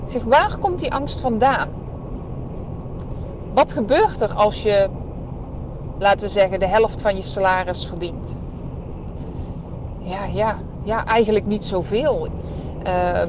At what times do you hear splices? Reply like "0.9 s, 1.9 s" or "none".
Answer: 12.3 s